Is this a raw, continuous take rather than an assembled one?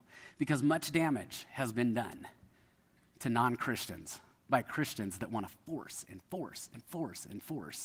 yes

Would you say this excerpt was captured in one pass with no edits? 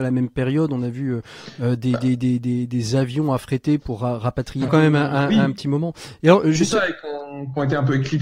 no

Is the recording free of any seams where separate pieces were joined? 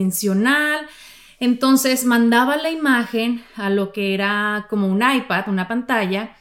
yes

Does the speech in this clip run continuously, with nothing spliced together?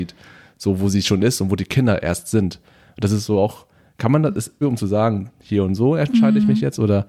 no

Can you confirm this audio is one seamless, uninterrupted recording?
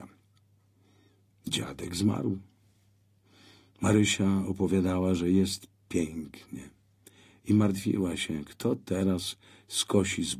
yes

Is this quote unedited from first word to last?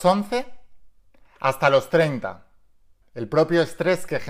no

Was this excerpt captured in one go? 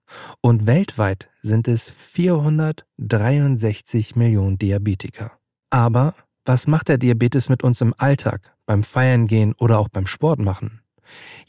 no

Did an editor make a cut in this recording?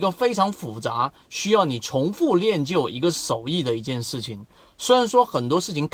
no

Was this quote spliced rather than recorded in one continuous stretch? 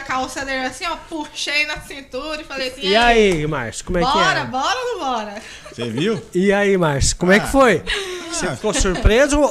no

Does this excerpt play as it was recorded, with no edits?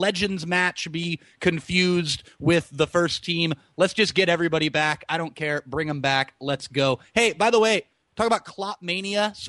yes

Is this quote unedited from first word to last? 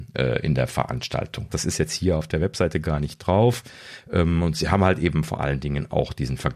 no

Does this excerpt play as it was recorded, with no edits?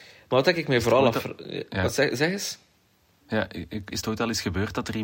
no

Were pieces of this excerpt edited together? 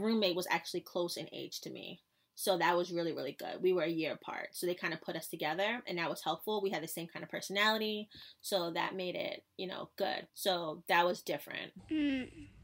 yes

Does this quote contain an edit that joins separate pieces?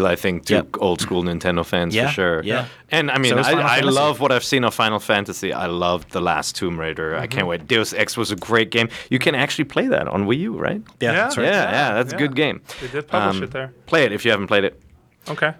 no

